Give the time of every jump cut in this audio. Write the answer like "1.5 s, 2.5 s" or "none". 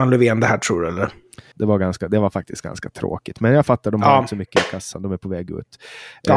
1.5 s